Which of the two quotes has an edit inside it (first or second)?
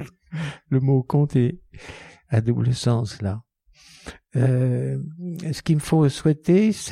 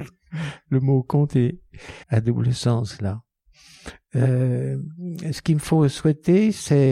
second